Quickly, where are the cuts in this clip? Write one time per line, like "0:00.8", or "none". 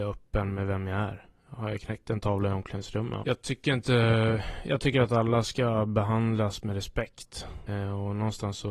0:03.2
0:07.7